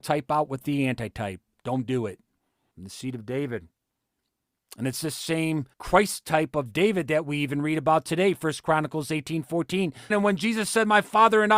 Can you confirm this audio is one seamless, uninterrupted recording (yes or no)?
no